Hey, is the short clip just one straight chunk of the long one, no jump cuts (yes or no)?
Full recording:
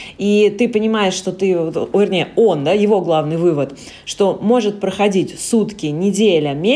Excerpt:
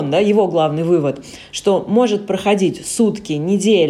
yes